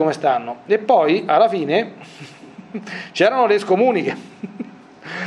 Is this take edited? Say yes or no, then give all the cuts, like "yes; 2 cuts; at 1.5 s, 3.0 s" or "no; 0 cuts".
no; 0 cuts